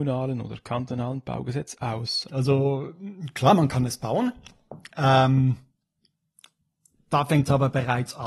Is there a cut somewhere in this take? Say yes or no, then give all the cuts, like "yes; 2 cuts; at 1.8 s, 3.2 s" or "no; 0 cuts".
yes; 1 cut; at 2.3 s